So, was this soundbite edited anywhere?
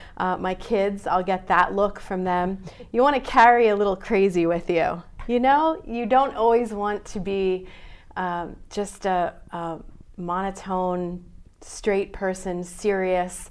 no; 0 cuts

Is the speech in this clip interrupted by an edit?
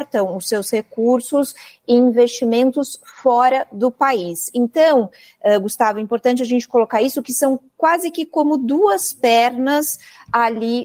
no; 0 cuts

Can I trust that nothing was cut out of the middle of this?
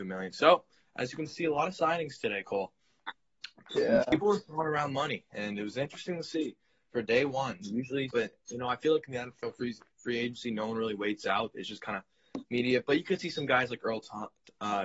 no; 1 cut; at 8.1 s

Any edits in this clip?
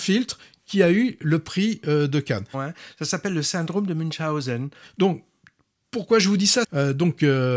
yes; 3 cuts; at 2.5 s, 4.8 s, 6.6 s

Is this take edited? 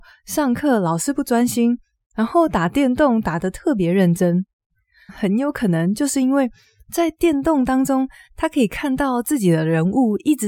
yes; 1 cut; at 5.1 s

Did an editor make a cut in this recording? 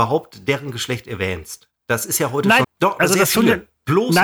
yes; 1 cut; at 2.6 s

